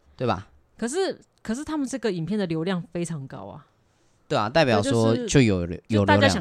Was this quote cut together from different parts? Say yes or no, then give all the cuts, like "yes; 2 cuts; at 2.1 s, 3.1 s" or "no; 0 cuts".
no; 0 cuts